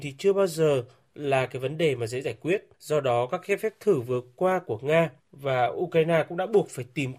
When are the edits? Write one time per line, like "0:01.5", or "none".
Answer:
0:02.7
0:05.2